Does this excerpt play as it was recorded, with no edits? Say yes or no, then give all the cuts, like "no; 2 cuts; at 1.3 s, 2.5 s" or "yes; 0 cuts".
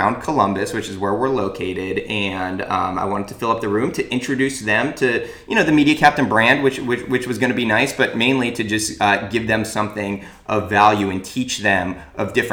yes; 0 cuts